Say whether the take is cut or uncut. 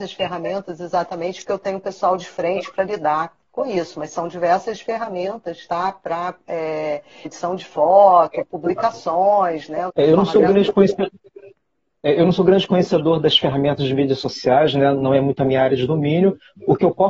cut